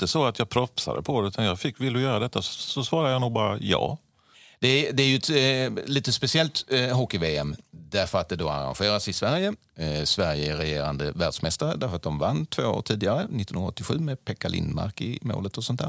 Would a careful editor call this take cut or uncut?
uncut